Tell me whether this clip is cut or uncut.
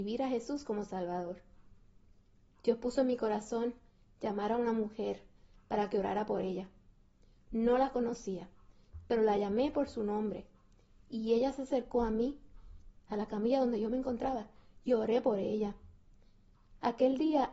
uncut